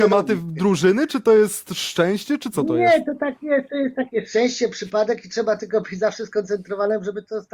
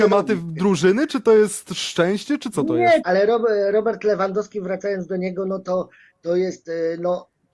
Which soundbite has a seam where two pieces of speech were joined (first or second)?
second